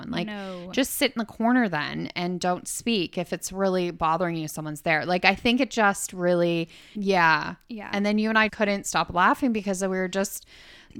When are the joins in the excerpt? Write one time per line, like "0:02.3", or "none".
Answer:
0:06.9
0:08.5